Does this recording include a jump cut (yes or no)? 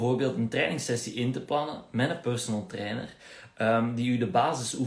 no